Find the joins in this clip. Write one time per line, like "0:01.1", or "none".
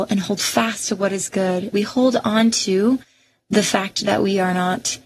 0:01.7